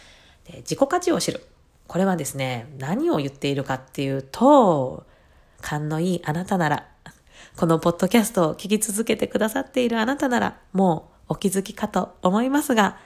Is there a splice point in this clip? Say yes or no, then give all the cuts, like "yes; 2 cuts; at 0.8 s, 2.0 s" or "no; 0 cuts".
yes; 1 cut; at 5.5 s